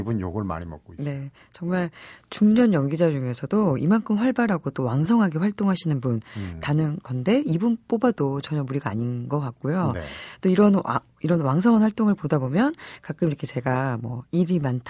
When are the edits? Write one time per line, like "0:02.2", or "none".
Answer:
none

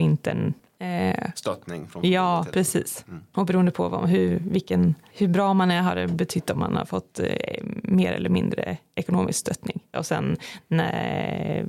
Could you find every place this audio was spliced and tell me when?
0:09.9

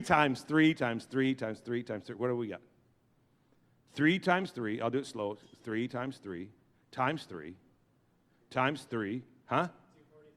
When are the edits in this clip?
none

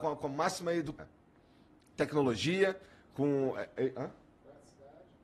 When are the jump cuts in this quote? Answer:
0:01.0

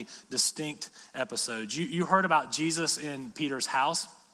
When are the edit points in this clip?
none

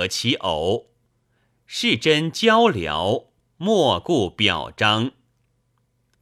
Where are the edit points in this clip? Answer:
none

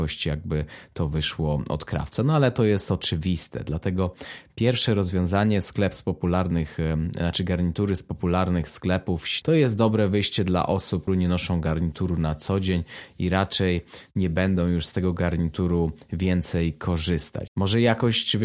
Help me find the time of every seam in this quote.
0:09.4
0:11.1
0:17.5

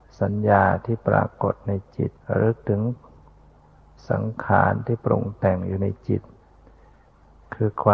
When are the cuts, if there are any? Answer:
0:02.2

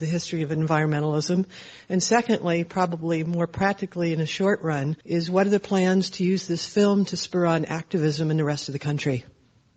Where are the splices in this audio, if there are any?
0:05.0

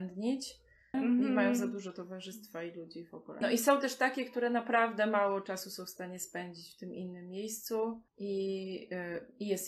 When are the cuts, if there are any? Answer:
0:00.9
0:03.4
0:08.1

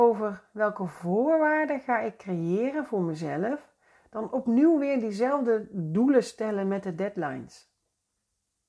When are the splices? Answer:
none

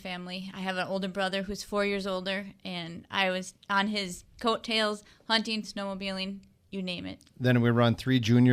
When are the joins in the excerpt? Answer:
0:05.6
0:07.3

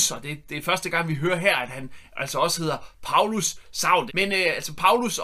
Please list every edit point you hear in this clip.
0:04.1

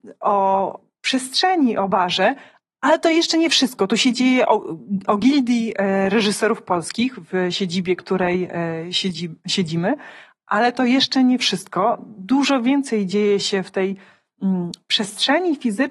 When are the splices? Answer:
none

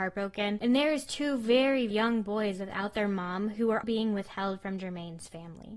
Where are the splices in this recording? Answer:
0:01.9
0:03.8

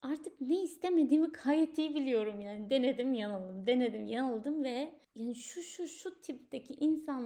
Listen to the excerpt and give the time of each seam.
none

